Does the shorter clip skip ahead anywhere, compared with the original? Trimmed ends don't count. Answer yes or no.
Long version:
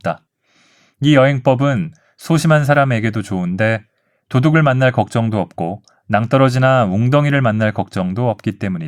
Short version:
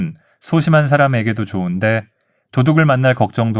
no